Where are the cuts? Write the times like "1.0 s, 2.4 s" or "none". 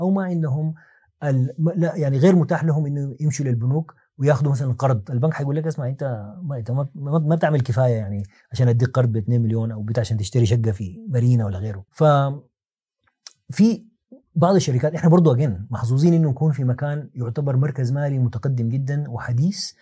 11.9 s